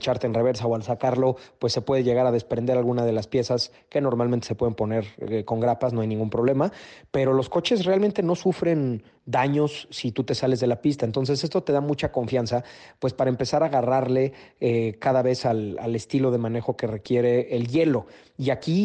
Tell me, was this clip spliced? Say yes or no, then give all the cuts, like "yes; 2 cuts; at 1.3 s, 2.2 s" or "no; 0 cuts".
no; 0 cuts